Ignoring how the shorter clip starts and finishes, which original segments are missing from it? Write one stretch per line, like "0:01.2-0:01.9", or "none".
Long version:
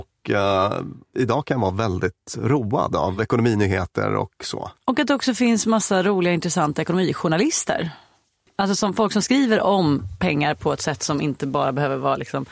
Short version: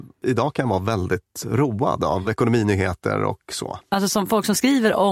0:04.7-0:08.5